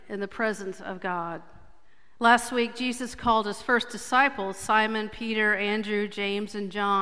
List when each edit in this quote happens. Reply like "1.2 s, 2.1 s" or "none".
2.2 s